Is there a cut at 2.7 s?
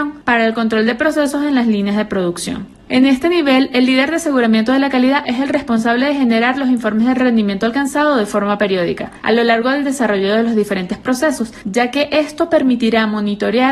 no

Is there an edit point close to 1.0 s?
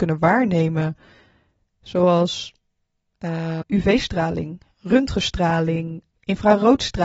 no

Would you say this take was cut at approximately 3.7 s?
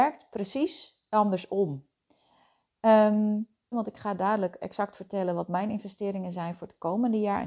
yes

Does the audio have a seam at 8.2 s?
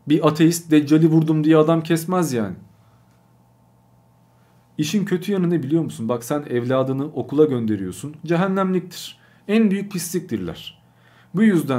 yes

